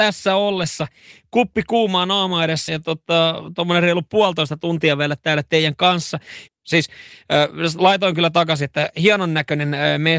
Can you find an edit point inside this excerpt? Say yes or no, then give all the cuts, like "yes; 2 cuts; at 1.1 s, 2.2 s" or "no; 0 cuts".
yes; 2 cuts; at 2.7 s, 6.5 s